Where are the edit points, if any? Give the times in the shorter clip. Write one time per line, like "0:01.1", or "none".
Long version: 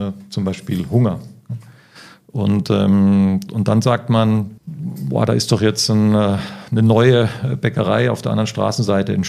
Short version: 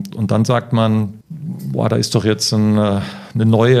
none